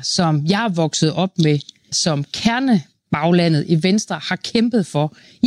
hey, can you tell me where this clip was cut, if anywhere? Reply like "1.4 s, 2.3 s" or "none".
1.9 s